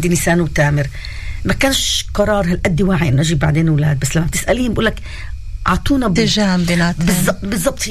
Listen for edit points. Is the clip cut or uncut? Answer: cut